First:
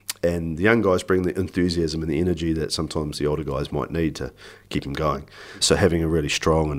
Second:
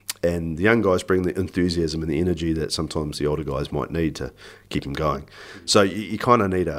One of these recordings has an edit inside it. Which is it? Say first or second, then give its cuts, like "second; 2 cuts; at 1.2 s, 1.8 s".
first; 1 cut; at 5.6 s